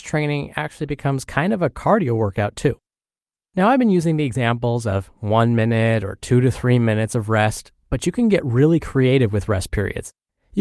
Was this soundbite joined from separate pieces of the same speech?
no; 0 cuts

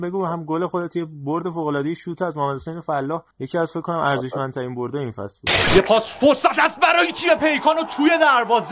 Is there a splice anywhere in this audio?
yes; 1 cut; at 3.3 s

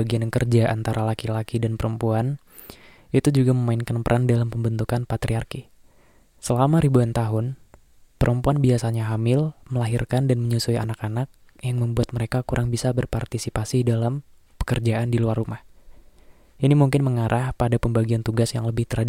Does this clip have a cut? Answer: no; 0 cuts

